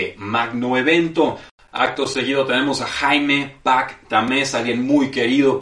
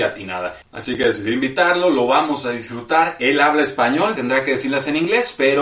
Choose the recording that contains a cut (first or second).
second